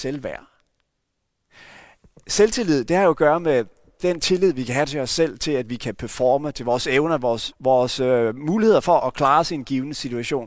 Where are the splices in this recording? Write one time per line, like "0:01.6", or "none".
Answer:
0:07.5
0:09.0